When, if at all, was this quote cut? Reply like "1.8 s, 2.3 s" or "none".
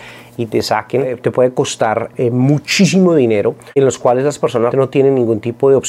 2.1 s, 4.7 s